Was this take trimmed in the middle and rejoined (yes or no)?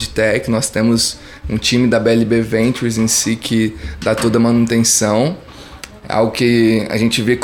no